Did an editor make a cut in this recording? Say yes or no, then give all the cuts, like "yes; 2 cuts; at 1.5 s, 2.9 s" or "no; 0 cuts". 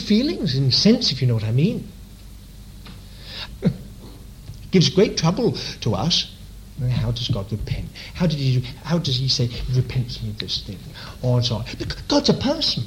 yes; 1 cut; at 3.5 s